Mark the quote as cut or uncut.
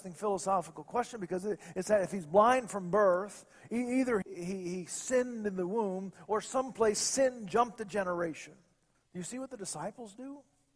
cut